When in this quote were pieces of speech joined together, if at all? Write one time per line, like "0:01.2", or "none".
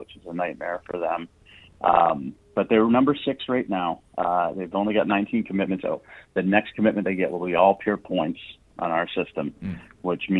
0:04.1
0:05.8